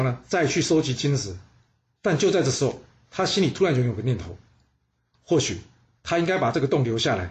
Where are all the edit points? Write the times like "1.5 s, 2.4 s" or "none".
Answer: none